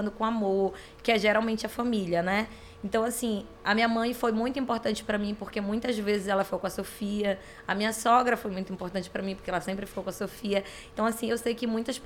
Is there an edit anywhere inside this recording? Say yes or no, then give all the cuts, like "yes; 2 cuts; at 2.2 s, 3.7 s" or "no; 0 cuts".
yes; 1 cut; at 10.9 s